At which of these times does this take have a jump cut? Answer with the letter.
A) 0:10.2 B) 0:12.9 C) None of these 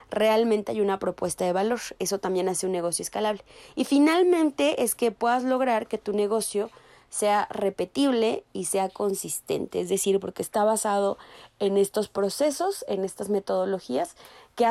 C